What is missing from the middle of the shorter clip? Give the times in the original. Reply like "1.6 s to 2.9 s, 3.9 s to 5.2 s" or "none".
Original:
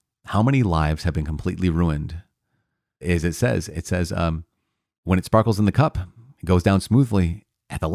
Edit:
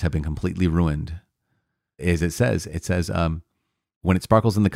none